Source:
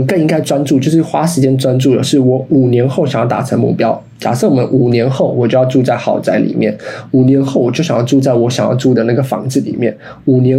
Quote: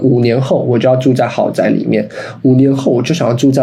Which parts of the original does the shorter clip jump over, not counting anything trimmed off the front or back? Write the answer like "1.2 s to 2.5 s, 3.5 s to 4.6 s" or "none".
none